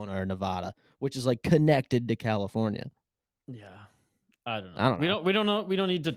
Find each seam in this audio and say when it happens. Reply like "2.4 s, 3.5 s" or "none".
none